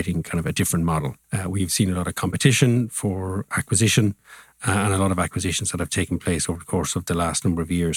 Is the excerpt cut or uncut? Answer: cut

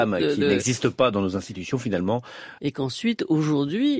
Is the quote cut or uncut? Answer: cut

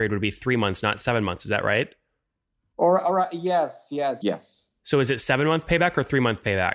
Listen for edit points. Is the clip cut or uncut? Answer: cut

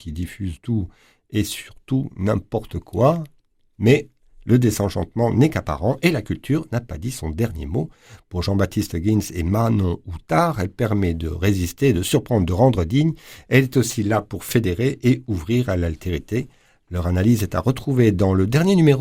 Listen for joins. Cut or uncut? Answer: uncut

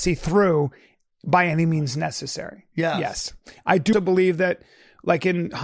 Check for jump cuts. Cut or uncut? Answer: cut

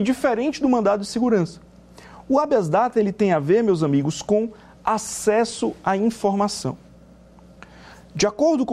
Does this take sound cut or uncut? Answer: uncut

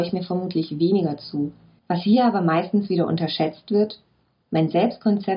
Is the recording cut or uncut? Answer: cut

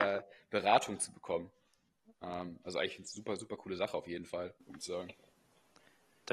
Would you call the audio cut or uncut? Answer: cut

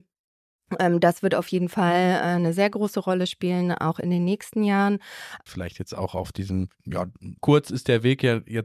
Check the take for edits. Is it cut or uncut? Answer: cut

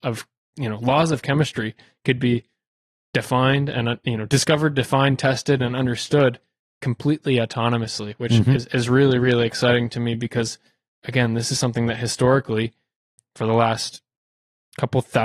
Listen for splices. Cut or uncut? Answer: uncut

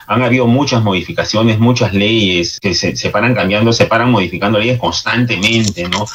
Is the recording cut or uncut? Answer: cut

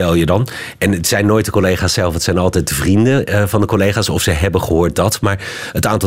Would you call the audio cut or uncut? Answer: uncut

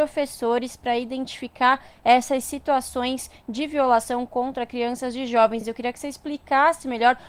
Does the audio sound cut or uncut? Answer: uncut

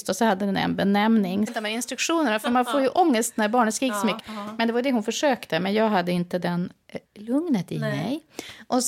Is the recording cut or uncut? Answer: cut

